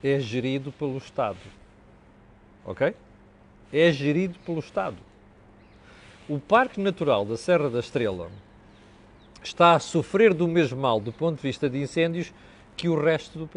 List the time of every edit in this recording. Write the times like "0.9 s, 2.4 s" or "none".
none